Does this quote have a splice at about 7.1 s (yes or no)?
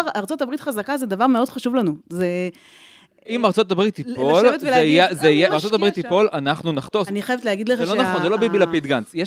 yes